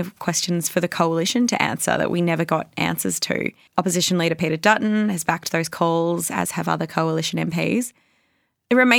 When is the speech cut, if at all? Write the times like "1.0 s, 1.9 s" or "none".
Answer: 3.7 s